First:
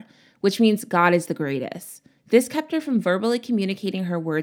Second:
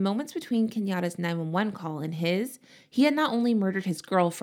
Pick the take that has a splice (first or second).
first